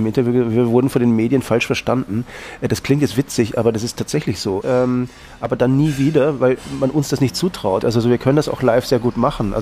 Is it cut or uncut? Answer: cut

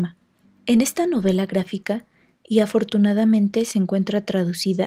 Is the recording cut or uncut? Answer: cut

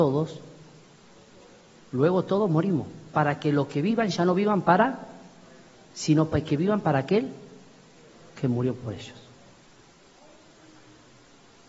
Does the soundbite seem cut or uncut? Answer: uncut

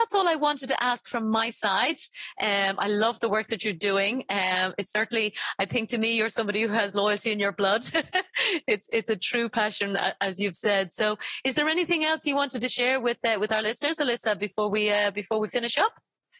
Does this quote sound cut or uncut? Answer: uncut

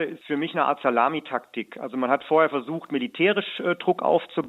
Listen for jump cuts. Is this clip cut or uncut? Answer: uncut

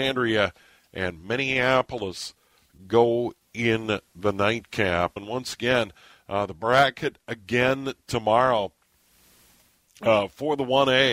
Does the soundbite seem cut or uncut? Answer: cut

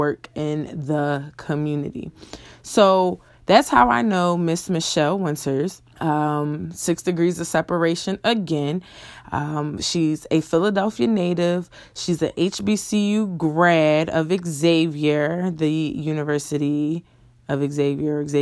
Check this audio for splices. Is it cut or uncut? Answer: cut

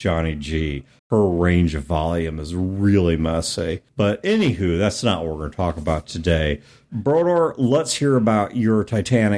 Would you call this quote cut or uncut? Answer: cut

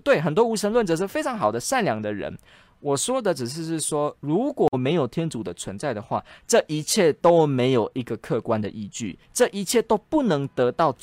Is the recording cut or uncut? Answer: uncut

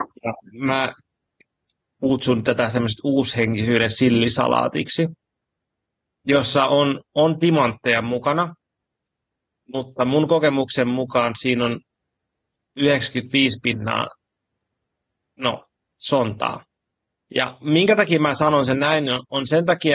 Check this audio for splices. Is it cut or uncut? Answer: uncut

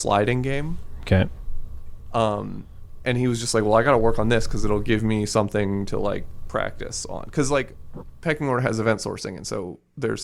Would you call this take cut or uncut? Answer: uncut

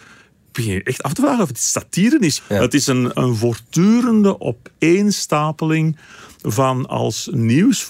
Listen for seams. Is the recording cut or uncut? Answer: cut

